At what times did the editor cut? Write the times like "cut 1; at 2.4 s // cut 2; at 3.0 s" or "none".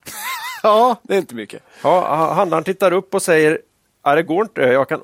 none